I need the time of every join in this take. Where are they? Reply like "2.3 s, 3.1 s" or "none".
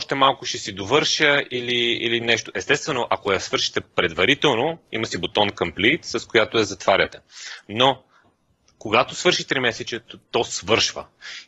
none